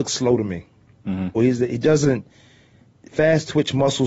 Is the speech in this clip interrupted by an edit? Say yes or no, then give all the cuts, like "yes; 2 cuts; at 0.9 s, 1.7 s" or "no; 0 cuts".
yes; 1 cut; at 1.4 s